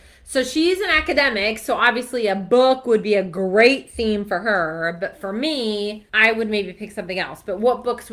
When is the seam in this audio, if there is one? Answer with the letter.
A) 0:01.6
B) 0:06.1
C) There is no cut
B